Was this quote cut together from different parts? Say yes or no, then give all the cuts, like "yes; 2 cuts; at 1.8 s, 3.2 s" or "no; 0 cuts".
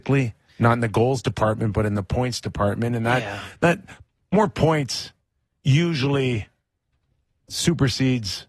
no; 0 cuts